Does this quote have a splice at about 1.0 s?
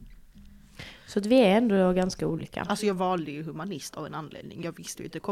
no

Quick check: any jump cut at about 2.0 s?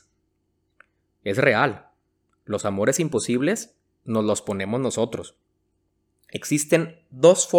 no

